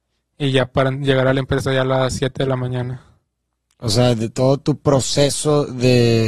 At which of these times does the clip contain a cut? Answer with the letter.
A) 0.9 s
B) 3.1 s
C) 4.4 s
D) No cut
D